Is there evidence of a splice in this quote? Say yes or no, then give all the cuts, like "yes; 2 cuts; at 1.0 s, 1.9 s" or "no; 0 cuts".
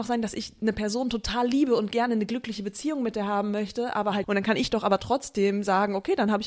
yes; 1 cut; at 4.2 s